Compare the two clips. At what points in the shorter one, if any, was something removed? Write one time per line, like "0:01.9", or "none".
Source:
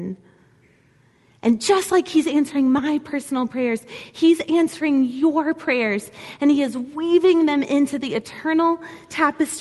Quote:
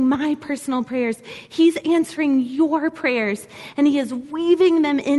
none

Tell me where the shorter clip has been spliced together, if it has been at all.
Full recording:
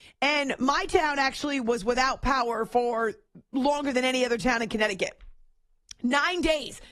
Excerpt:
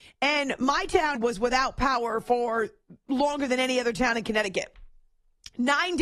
0:01.1

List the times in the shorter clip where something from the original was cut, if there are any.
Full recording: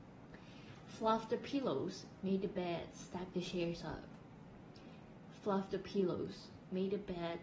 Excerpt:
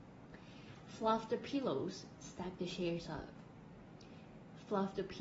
0:02.2

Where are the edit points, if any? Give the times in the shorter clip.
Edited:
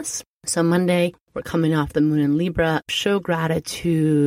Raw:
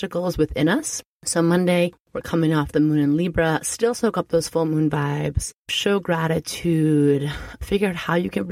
0:02.8

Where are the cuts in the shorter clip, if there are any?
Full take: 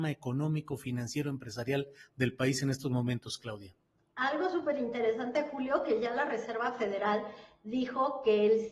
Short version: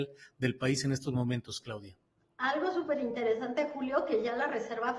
none

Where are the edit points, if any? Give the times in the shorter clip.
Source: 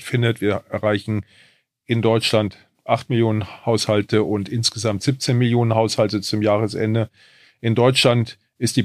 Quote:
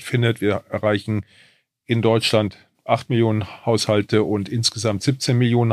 none

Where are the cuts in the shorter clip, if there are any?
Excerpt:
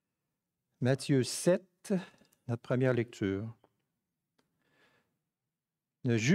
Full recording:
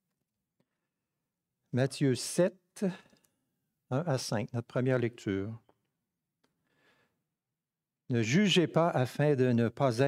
0:02.4

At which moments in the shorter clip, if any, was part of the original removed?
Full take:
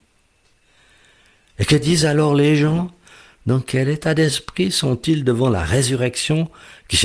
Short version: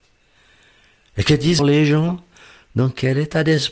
0:01.6

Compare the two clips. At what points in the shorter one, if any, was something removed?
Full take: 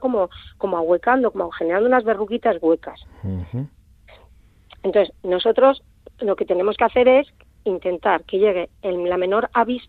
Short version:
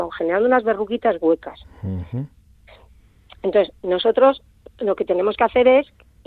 none

